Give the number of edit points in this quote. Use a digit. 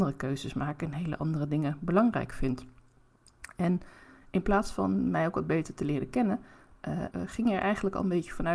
1